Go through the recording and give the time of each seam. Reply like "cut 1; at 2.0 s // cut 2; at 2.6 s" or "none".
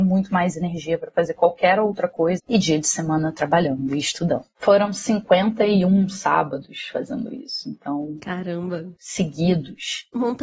cut 1; at 2.4 s

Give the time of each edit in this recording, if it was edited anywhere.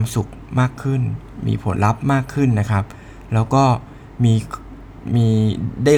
cut 1; at 1.8 s

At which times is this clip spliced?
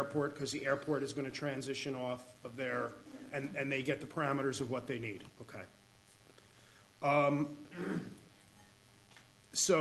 cut 1; at 5.3 s

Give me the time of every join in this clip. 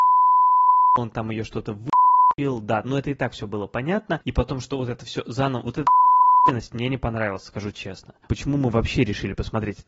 cut 1; at 2.8 s // cut 2; at 8.3 s

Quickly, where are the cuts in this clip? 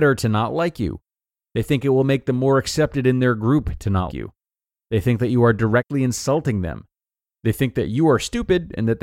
cut 1; at 4.1 s

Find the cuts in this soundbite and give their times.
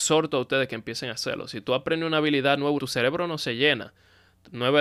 cut 1; at 2.8 s

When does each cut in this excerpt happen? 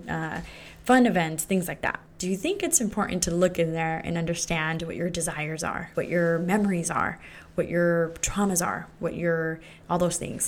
cut 1; at 2.1 s // cut 2; at 5.9 s // cut 3; at 8.9 s

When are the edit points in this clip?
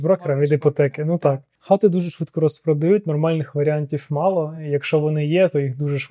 none

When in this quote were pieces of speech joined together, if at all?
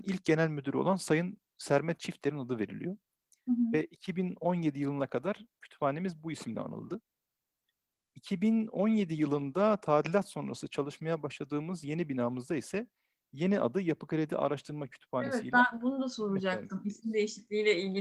none

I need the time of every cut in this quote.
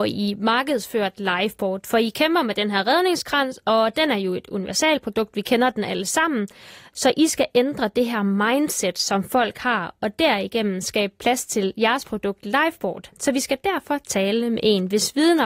none

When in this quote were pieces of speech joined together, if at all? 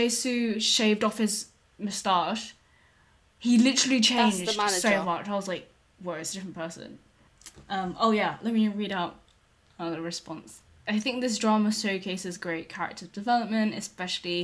none

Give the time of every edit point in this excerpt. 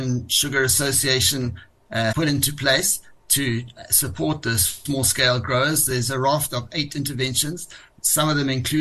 cut 1; at 2.1 s

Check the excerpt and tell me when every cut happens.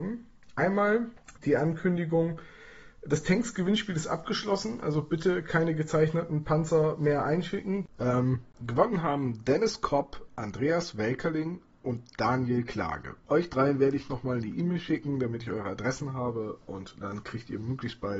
cut 1; at 1.4 s

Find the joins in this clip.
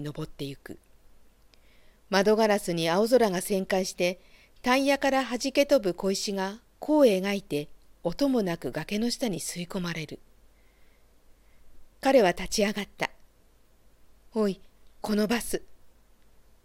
cut 1; at 11.9 s // cut 2; at 14.8 s

